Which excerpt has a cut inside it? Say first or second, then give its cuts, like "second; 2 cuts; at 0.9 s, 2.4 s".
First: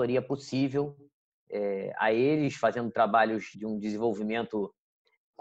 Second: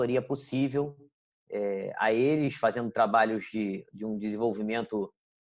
first; 1 cut; at 3.5 s